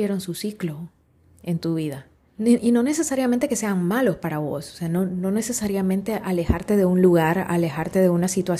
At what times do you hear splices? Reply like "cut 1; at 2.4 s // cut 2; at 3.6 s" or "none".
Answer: cut 1; at 2.3 s